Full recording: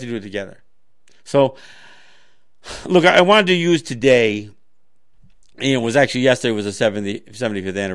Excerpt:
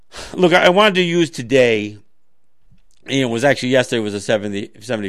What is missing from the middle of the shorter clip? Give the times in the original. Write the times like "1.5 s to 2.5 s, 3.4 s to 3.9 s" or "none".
none